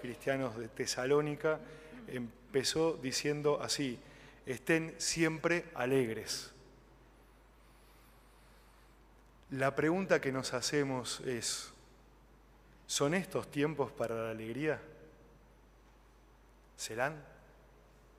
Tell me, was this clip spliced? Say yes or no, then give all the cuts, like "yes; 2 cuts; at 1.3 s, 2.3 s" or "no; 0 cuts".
no; 0 cuts